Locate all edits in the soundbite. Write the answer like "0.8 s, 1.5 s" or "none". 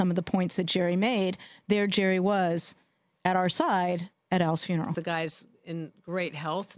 4.9 s